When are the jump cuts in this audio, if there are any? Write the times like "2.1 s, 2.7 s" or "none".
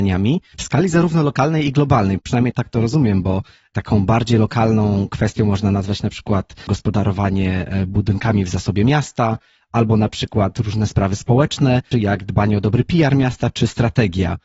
11.9 s

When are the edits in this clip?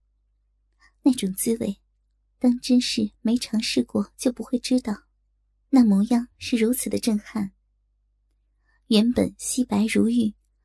5.6 s

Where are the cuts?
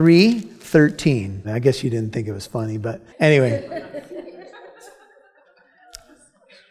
1.4 s, 3.1 s

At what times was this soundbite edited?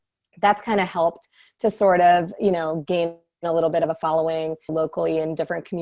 4.7 s

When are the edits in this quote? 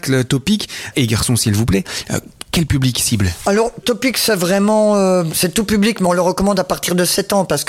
0.9 s

